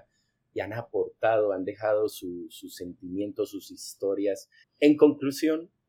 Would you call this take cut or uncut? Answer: cut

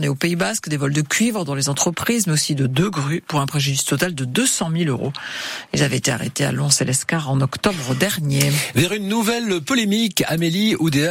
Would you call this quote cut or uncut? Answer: uncut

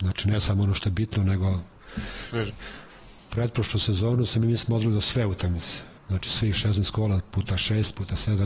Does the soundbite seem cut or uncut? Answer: cut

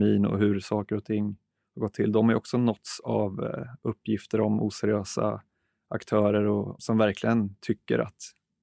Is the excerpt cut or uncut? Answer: cut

